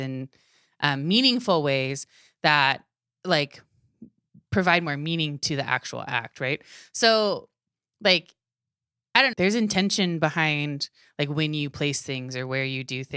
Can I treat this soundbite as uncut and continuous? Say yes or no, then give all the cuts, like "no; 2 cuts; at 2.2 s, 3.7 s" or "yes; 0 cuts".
no; 1 cut; at 9.3 s